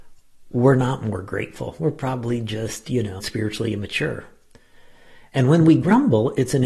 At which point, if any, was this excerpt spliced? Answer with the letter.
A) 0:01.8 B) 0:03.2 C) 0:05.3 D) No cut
B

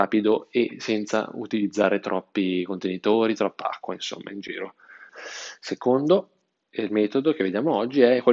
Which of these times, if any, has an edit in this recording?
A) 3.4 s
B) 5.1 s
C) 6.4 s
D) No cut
B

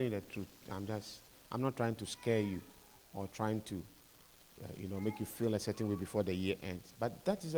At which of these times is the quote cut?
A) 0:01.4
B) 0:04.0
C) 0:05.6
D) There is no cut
D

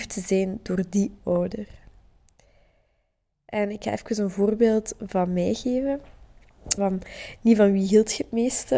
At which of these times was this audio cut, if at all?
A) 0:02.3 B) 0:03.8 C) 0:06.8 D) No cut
C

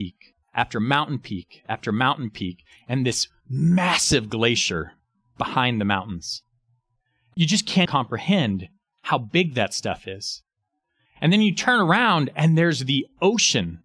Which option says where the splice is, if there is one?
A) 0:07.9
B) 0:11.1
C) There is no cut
A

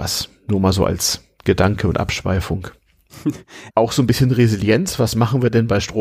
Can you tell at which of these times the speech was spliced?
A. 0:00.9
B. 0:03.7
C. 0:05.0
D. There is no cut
B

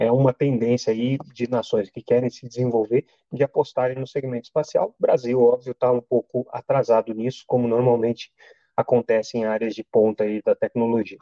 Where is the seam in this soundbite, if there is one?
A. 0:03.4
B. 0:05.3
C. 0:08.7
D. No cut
D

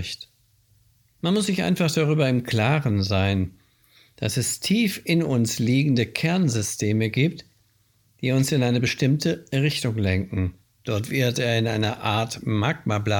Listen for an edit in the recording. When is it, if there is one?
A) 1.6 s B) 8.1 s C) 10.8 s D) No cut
C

